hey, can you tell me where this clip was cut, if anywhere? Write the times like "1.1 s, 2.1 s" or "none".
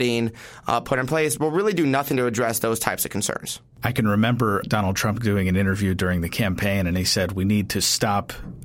4.6 s